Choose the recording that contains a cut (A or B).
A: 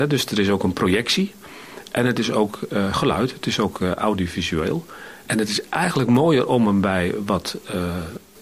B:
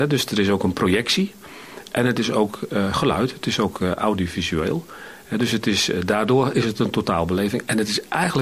A